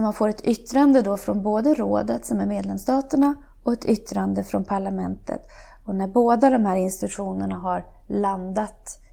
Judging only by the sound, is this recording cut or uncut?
uncut